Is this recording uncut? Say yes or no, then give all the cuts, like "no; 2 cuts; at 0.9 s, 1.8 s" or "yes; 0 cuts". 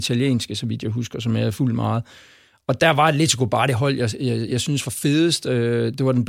yes; 0 cuts